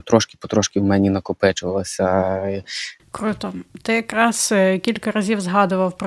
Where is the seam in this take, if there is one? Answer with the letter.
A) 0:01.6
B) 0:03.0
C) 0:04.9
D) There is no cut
B